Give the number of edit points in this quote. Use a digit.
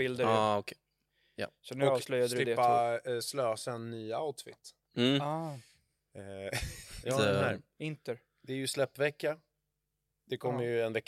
1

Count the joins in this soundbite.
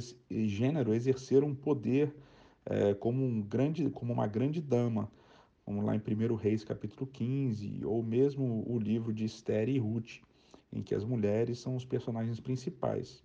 0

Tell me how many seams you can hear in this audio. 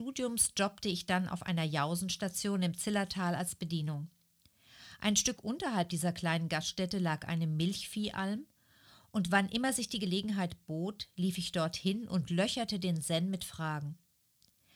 0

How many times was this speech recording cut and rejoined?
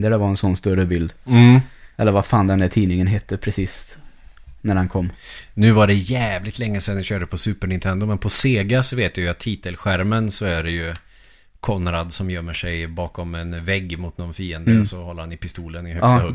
1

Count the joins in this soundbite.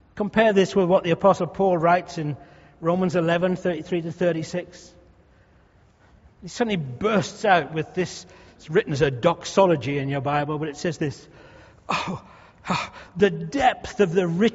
0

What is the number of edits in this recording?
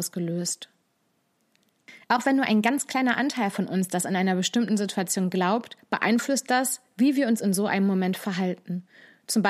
1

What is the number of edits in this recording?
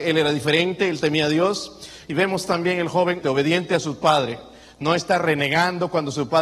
2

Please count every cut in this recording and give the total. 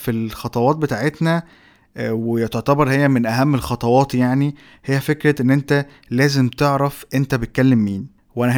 0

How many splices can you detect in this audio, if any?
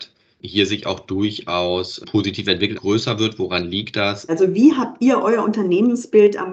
2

